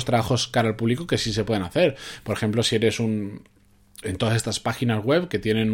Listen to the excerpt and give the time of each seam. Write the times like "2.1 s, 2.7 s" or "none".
4.0 s